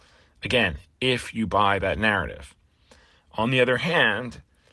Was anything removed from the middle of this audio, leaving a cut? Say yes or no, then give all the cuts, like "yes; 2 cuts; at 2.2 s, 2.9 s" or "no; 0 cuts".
no; 0 cuts